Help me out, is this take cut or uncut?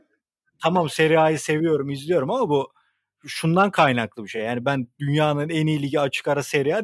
uncut